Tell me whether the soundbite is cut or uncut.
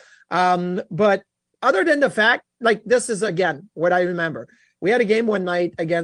uncut